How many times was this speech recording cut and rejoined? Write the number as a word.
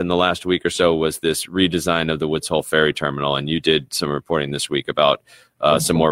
zero